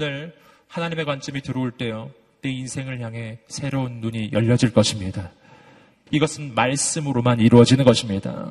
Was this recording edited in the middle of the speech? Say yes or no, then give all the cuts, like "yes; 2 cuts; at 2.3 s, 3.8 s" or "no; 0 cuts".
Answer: yes; 1 cut; at 6.1 s